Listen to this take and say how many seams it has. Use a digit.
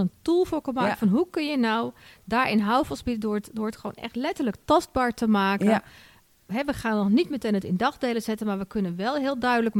0